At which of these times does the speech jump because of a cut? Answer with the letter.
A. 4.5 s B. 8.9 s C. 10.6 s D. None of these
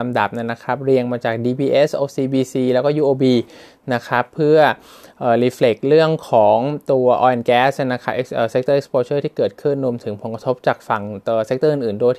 D